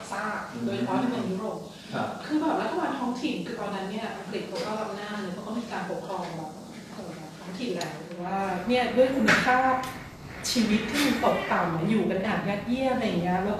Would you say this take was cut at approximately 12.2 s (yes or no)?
yes